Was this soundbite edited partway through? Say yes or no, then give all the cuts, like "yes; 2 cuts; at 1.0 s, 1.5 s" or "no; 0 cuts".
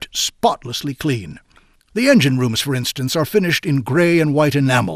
no; 0 cuts